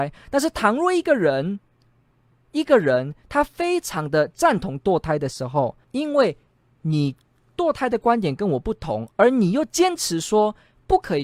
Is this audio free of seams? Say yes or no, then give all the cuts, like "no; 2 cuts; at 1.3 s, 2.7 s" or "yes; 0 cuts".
no; 1 cut; at 5.8 s